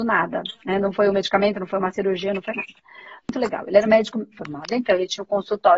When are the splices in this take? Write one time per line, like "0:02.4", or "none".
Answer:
0:03.2
0:04.3